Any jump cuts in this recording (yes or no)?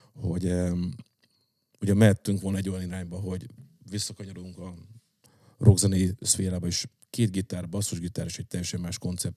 no